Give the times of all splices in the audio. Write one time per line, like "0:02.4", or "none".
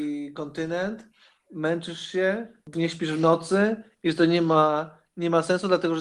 0:02.7

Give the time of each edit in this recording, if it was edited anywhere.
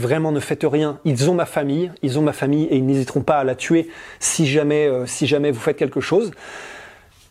none

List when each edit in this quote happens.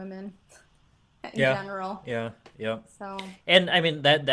none

